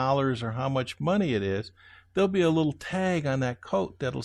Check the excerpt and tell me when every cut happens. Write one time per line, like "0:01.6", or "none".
none